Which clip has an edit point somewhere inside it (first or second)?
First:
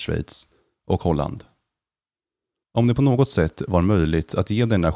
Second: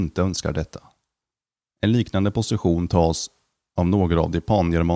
first